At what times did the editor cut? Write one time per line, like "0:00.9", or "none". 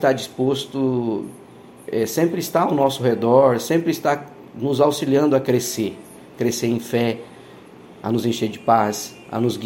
none